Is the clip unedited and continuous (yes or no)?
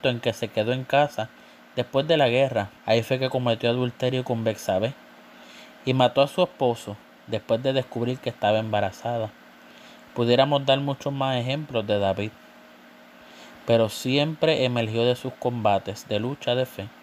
no